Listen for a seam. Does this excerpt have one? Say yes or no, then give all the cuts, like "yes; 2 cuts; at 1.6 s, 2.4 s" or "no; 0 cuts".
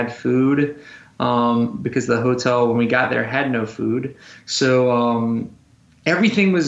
no; 0 cuts